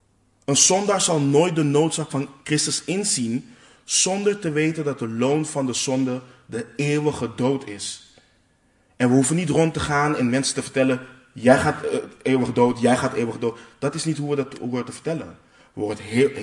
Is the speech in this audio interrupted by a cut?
no; 0 cuts

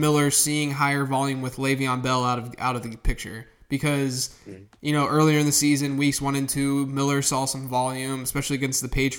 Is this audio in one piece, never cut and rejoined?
yes; 0 cuts

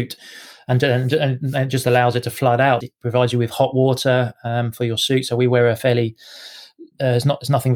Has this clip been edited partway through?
yes; 1 cut; at 2.8 s

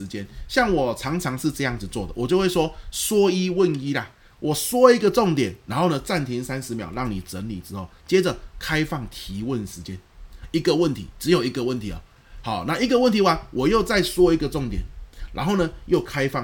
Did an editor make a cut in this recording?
no; 0 cuts

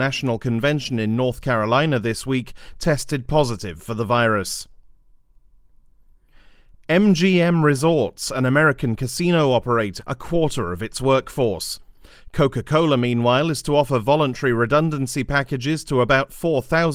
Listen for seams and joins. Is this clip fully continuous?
no; 1 cut; at 10.0 s

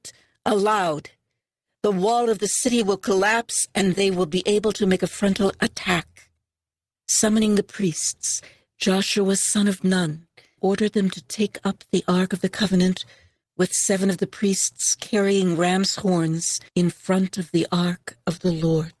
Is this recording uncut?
no; 2 cuts; at 10.6 s, 16.7 s

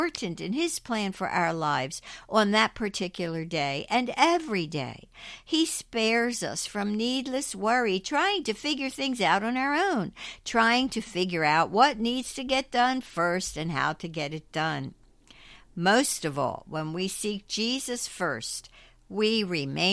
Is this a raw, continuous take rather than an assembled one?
yes; 0 cuts

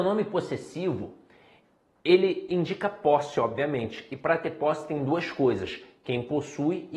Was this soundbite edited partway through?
no; 0 cuts

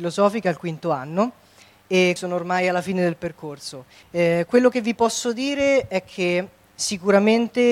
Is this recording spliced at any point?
yes; 2 cuts; at 2.2 s, 4.0 s

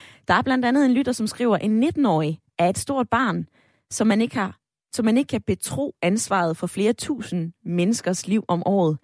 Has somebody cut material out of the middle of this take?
no; 0 cuts

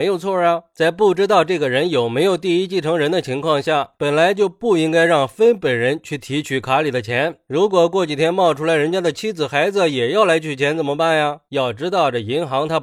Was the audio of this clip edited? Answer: no; 0 cuts

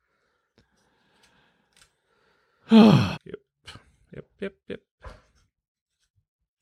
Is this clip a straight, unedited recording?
no; 1 cut; at 3.1 s

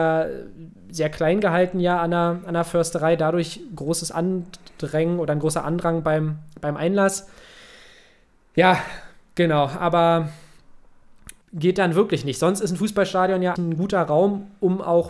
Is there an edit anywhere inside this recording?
yes; 2 cuts; at 11.4 s, 13.6 s

